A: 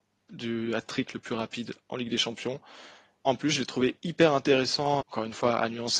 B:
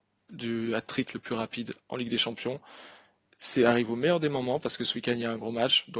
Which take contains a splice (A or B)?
A